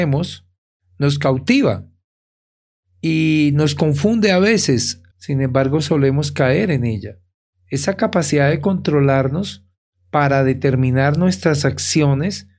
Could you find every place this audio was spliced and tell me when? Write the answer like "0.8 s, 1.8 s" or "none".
5.1 s